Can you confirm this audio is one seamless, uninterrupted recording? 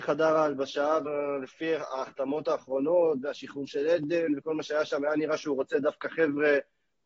no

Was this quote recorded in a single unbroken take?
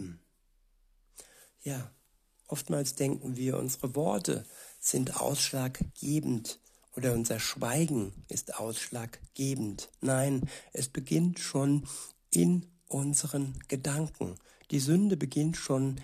yes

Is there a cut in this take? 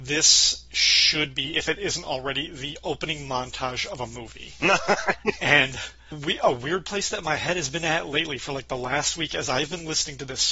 no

